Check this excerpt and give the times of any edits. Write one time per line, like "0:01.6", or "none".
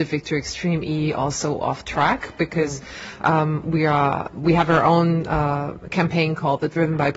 none